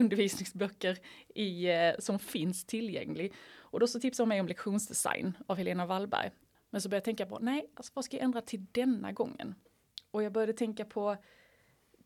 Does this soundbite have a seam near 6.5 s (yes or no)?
yes